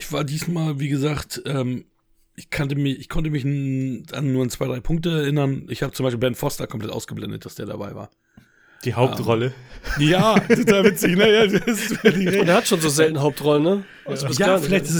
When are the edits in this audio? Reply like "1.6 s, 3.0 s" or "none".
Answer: none